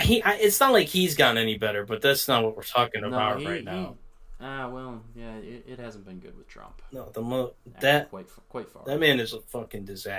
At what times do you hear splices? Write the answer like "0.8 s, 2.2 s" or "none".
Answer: none